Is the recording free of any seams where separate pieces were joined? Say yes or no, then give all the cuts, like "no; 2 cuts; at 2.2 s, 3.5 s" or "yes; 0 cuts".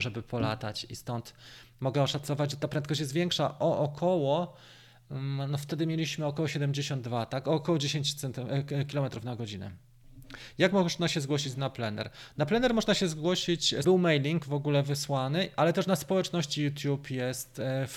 no; 1 cut; at 13.8 s